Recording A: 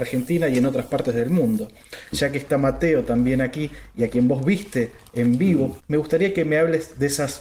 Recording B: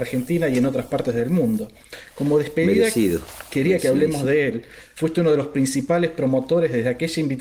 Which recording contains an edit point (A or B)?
A